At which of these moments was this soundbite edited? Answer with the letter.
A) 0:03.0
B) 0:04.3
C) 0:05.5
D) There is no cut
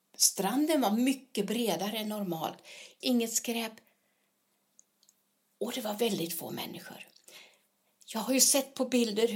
A